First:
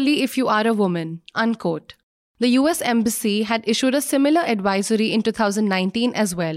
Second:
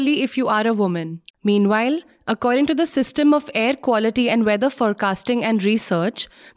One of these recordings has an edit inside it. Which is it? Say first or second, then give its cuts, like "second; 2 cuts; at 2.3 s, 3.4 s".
second; 1 cut; at 1.3 s